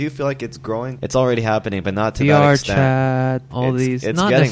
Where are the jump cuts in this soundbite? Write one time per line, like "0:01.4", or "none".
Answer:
0:01.0
0:03.5